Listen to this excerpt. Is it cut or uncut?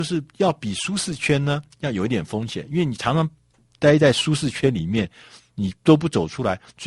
uncut